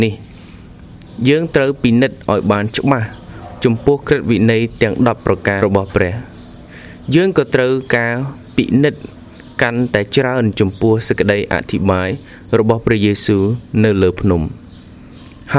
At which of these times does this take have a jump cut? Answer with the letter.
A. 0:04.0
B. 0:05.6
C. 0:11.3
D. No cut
B